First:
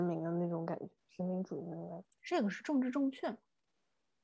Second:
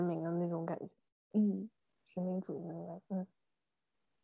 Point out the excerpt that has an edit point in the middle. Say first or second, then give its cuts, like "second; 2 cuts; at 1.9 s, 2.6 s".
first; 2 cuts; at 1.0 s, 2.0 s